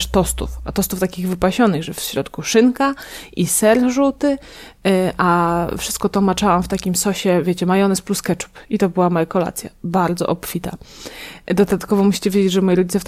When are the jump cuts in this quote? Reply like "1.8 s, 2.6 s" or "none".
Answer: none